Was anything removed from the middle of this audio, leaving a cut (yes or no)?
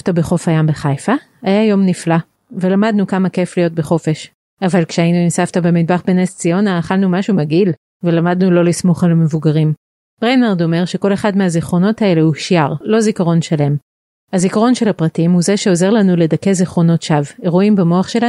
yes